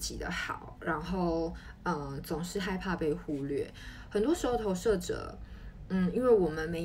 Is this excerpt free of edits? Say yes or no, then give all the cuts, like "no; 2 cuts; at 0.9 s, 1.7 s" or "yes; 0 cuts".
yes; 0 cuts